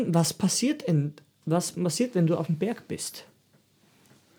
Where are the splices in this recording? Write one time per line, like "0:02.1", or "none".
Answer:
none